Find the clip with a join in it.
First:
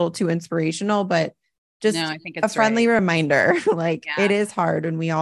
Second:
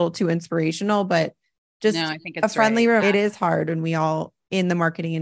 second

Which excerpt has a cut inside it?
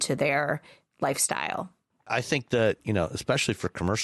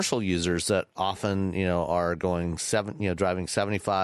first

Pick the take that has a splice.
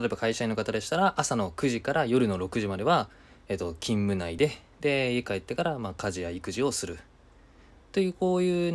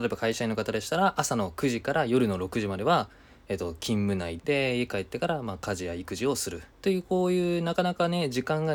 second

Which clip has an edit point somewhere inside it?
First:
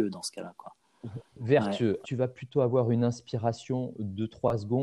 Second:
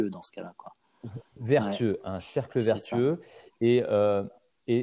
first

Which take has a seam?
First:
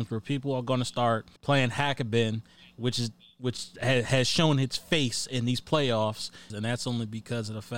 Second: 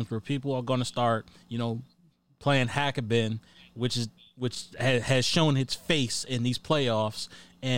first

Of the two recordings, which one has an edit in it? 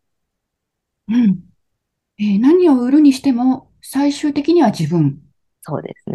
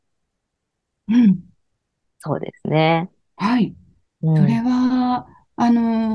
second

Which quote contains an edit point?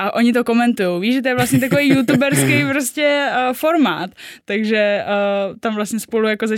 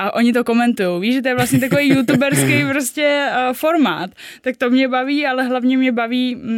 first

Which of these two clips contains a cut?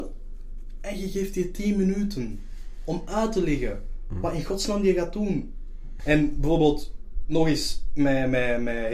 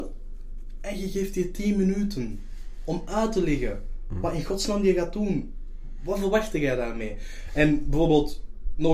first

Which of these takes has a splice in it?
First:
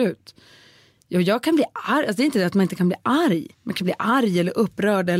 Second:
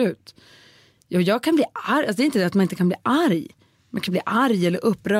first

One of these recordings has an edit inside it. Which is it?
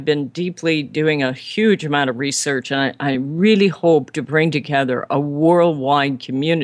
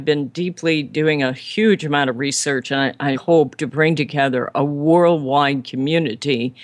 second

